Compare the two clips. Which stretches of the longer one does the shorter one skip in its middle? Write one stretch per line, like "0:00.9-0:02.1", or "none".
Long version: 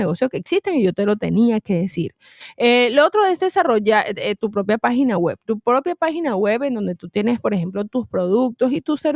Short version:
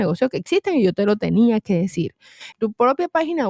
0:02.5-0:05.4